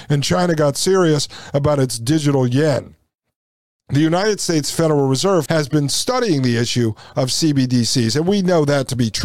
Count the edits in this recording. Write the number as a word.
one